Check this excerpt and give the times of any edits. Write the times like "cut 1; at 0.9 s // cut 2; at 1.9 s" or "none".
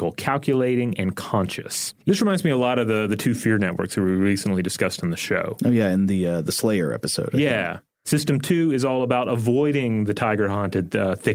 cut 1; at 2.0 s